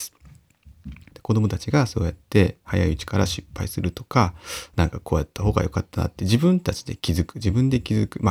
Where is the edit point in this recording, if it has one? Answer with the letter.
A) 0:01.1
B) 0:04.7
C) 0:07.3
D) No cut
A